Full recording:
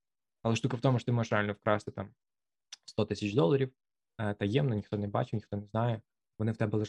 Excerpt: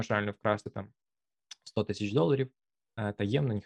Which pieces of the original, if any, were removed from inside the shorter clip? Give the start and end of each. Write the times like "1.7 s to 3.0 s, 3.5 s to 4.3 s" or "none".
none